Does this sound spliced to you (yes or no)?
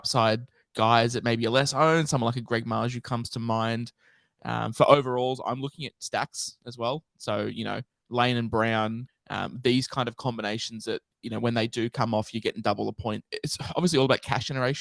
yes